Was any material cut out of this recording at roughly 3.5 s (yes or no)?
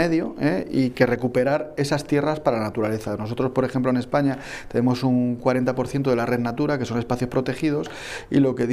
no